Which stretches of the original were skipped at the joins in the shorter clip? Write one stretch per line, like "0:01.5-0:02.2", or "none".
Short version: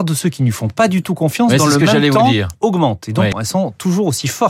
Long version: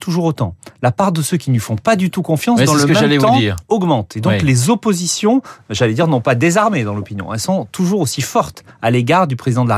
0:04.4-0:07.3